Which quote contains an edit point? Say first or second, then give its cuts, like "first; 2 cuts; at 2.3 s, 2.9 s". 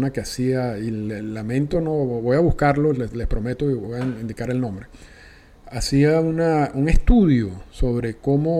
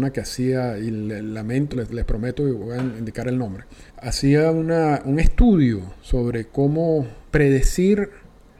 second; 3 cuts; at 1.7 s, 3.9 s, 7.3 s